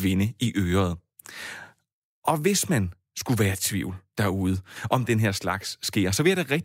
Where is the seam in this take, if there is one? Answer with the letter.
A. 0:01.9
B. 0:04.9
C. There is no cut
C